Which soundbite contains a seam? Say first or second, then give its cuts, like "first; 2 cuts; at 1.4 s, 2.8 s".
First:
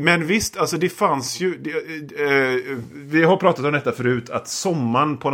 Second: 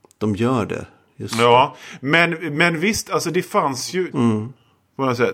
second; 1 cut; at 4.1 s